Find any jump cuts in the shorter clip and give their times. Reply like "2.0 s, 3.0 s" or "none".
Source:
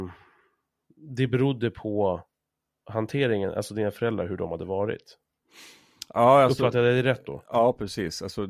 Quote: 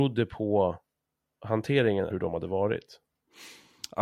2.1 s